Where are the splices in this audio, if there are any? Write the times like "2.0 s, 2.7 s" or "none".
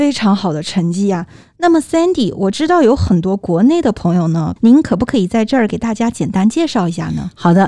4.6 s